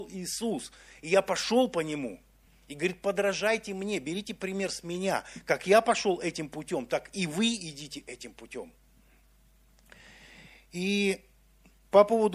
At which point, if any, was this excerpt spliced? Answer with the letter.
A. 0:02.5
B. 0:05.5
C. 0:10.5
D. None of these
D